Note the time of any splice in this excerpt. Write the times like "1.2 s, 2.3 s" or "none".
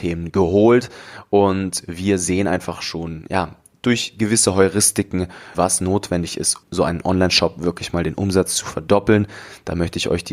5.5 s, 6.6 s